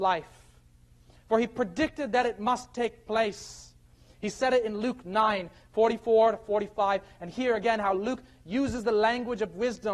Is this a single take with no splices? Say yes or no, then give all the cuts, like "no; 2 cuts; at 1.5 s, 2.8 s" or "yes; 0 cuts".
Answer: yes; 0 cuts